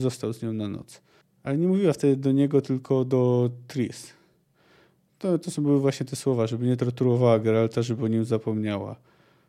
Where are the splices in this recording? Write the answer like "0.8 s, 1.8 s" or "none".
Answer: 1.2 s